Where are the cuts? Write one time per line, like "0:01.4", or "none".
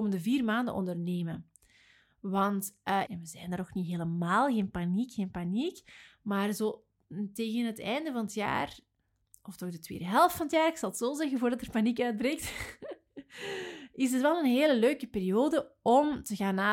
0:03.1